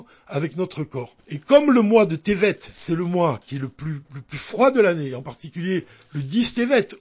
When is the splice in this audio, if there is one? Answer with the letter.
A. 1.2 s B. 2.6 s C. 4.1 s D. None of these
A